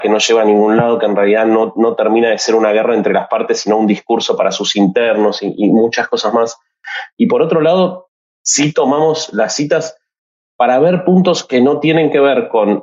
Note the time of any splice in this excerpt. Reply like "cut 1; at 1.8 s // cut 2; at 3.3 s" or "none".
none